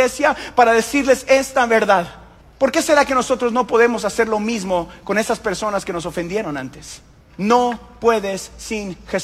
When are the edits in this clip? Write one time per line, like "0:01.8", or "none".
0:02.4
0:07.2